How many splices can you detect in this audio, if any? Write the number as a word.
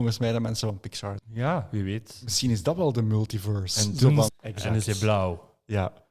two